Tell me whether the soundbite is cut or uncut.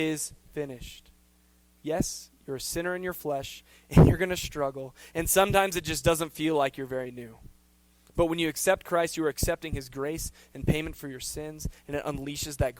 uncut